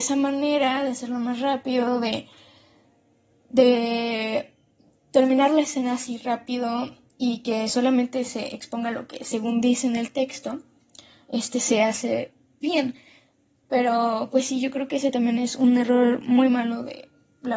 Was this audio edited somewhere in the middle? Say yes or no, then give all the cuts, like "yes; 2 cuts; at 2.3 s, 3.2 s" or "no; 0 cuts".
yes; 1 cut; at 12.6 s